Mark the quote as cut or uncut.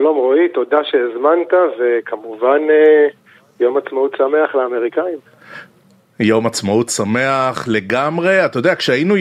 uncut